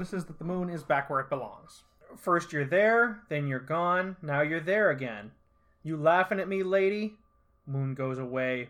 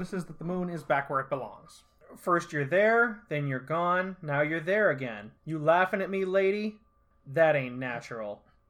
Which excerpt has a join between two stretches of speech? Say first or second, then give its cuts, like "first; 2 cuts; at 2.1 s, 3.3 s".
second; 2 cuts; at 5.4 s, 7.1 s